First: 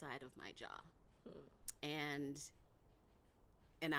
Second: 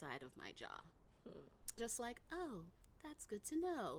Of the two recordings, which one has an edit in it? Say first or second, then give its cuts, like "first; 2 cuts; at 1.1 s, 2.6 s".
second; 1 cut; at 1.8 s